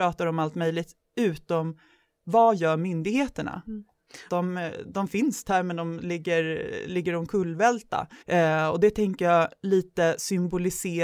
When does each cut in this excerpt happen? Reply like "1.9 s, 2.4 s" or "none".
4.3 s, 8.2 s